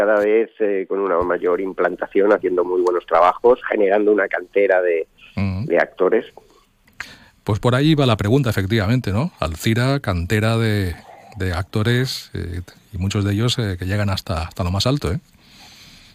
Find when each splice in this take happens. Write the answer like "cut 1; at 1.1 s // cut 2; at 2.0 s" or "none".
none